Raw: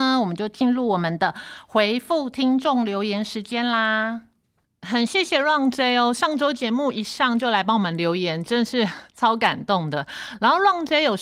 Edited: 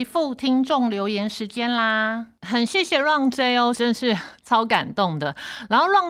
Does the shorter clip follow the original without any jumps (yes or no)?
no